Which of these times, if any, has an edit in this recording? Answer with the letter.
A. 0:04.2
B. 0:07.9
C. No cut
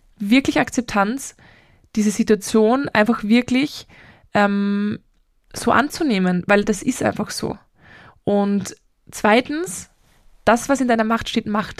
C